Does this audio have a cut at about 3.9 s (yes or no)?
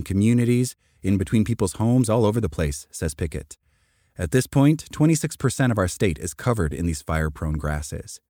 no